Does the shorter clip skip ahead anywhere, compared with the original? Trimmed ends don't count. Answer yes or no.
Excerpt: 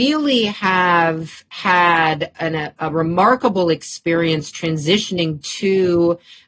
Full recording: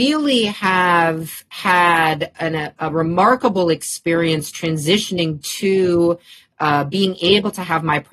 no